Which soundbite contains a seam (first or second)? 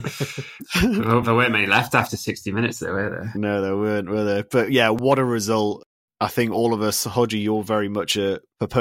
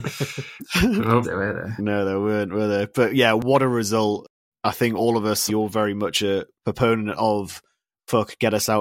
second